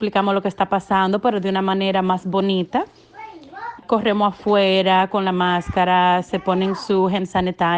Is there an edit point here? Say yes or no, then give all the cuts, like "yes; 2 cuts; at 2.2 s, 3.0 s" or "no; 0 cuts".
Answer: yes; 1 cut; at 3.8 s